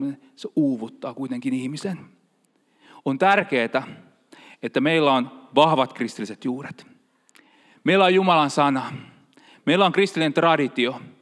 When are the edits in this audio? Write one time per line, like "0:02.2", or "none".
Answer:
none